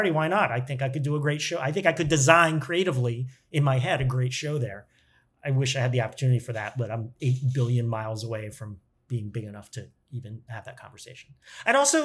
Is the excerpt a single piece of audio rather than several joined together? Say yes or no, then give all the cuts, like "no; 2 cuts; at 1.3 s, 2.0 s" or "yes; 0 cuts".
yes; 0 cuts